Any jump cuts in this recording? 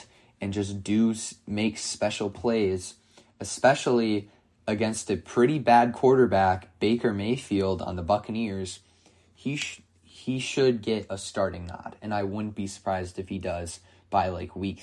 no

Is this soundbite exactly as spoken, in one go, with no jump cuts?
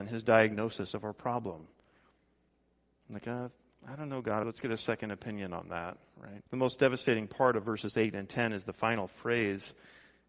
no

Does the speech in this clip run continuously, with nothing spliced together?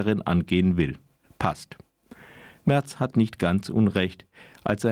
yes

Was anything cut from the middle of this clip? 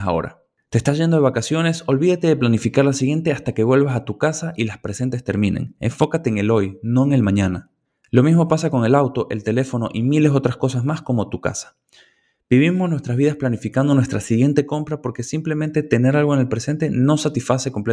no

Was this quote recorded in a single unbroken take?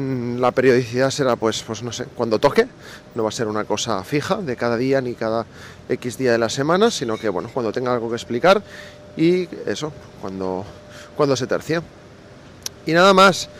no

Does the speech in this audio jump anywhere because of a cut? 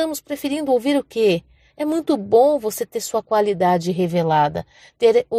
yes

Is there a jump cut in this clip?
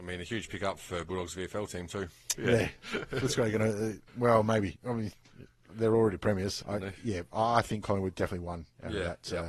yes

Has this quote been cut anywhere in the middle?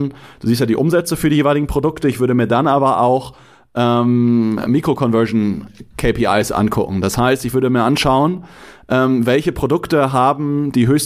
no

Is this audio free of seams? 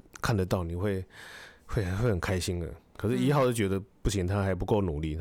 yes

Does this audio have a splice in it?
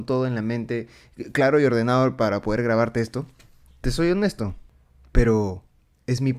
no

